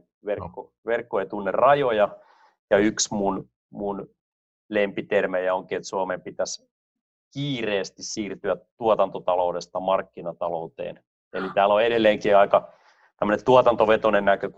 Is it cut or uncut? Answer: uncut